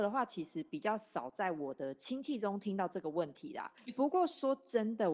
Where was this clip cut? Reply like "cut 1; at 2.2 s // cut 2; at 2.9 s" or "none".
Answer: cut 1; at 3.8 s